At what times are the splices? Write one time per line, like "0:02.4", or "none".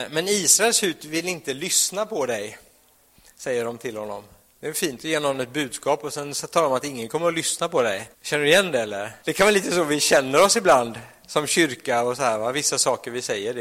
0:08.1
0:09.2